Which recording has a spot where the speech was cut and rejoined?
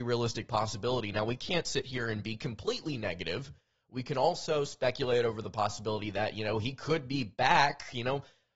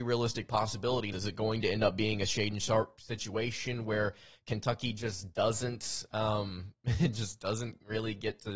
second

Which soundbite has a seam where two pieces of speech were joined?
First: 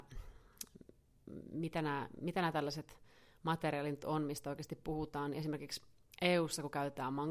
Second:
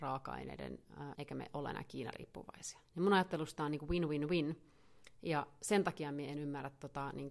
second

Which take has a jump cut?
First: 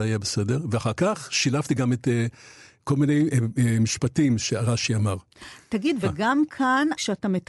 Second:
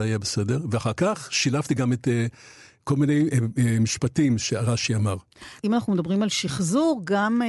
second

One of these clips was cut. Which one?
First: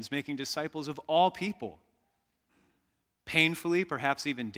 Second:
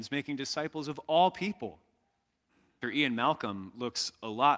second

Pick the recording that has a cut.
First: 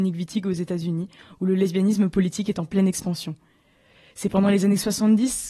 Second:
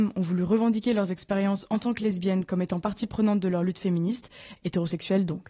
second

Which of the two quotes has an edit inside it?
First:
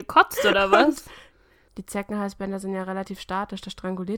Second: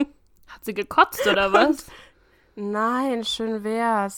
first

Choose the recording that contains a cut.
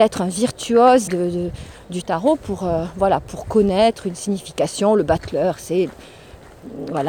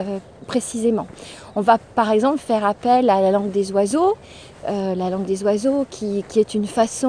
first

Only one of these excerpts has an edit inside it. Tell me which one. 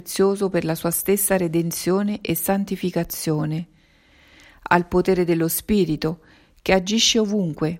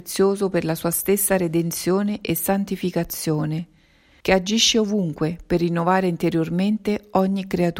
second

